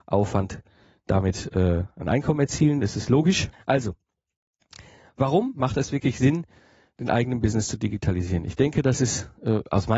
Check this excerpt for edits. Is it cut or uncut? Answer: cut